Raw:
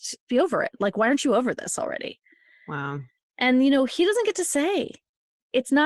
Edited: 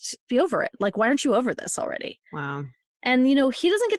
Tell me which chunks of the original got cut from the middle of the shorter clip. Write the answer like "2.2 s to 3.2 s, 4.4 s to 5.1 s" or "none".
2.3 s to 2.6 s